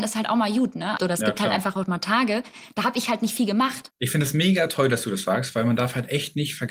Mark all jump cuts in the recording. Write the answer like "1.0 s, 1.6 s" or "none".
1.0 s, 3.9 s

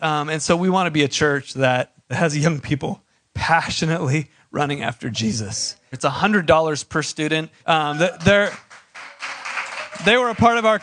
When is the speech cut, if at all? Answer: 2.0 s, 5.9 s, 7.6 s

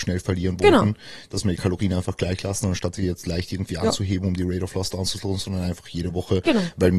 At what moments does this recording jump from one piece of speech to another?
none

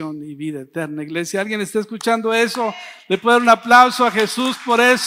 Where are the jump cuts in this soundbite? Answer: none

